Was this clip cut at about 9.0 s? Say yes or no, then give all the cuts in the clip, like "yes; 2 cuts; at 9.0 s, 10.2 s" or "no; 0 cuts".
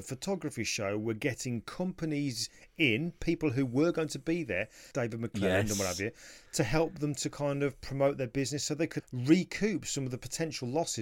yes; 2 cuts; at 4.9 s, 9.0 s